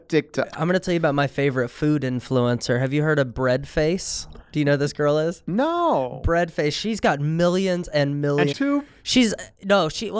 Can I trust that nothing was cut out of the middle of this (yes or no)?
no